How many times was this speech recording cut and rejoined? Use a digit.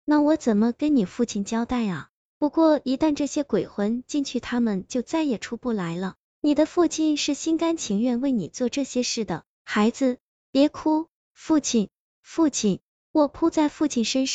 1